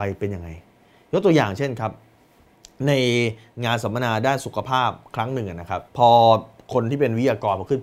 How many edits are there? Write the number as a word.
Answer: one